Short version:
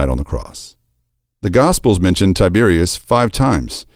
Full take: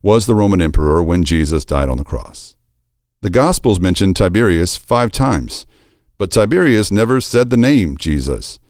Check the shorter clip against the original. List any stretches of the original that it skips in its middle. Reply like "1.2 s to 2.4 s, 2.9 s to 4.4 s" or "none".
none